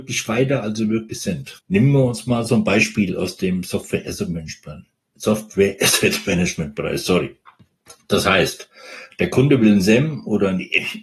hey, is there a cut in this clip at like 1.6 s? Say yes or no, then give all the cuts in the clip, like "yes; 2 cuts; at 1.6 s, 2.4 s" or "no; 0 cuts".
yes; 1 cut; at 1.6 s